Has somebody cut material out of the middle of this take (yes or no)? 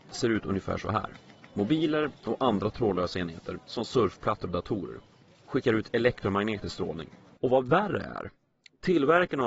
yes